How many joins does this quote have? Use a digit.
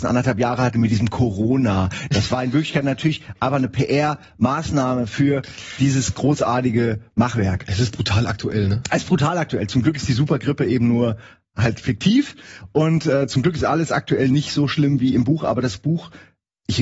0